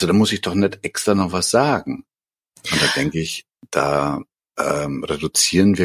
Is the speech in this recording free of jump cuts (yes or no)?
yes